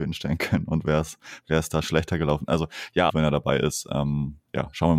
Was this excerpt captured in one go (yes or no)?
no